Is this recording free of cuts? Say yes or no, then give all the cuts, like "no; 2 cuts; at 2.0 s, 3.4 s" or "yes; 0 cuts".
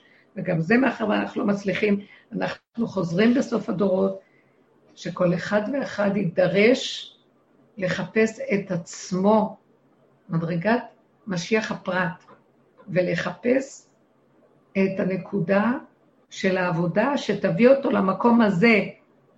yes; 0 cuts